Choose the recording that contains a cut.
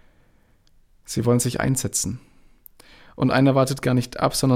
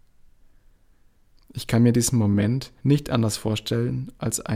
second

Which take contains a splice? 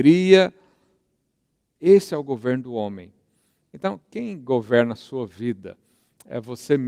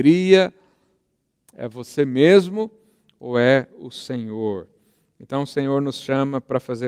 second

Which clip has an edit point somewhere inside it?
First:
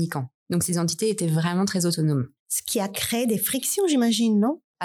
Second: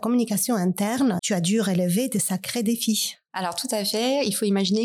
second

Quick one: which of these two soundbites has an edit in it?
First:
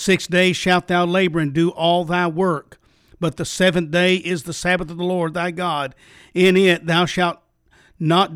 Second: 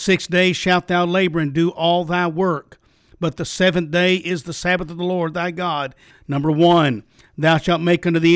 second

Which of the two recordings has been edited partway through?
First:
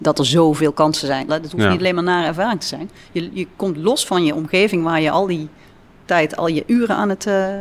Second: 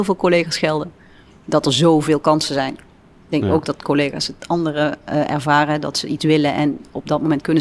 first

